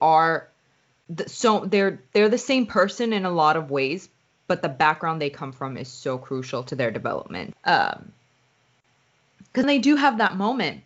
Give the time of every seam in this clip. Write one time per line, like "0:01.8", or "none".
0:07.5
0:09.6